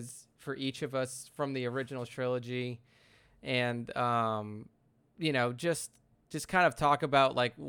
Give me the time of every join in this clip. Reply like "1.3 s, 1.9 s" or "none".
none